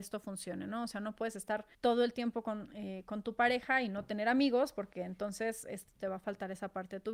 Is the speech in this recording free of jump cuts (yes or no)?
no